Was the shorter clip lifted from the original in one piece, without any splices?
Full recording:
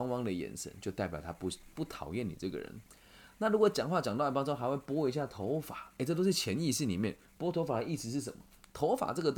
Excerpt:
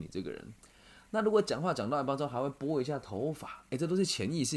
yes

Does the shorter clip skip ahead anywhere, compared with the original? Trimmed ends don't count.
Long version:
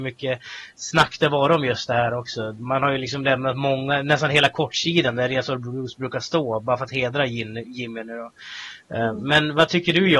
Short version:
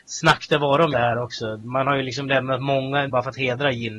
yes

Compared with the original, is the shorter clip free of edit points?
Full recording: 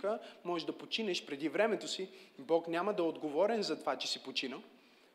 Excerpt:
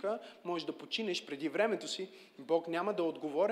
yes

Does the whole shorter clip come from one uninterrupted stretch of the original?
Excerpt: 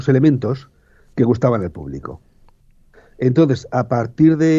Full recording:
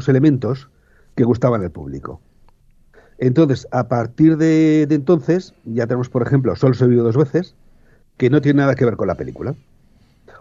yes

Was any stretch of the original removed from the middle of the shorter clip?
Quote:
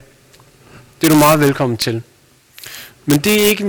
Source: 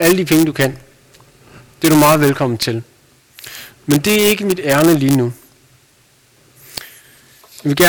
no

